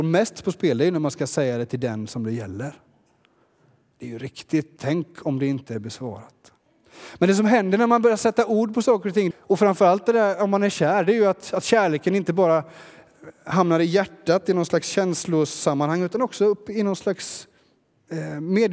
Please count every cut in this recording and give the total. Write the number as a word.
two